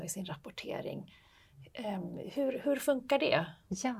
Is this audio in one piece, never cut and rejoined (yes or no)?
yes